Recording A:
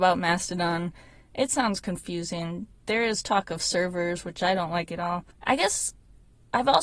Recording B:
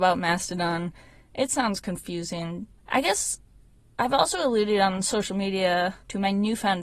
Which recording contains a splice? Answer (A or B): B